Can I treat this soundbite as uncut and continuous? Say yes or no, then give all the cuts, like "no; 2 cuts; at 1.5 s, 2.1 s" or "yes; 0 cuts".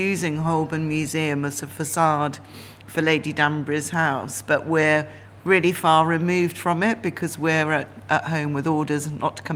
yes; 0 cuts